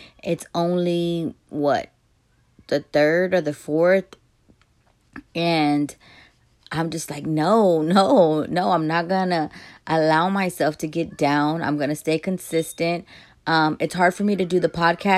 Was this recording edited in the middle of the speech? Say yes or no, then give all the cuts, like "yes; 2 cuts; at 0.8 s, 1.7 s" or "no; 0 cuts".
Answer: no; 0 cuts